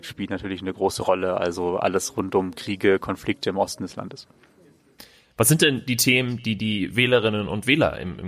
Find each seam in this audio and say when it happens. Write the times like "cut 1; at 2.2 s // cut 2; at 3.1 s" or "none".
none